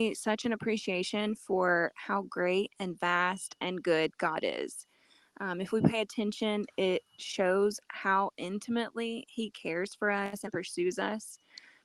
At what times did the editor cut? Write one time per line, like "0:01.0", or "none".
none